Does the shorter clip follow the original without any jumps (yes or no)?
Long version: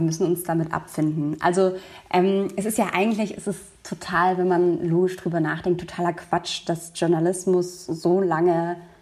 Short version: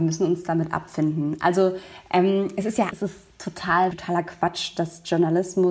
no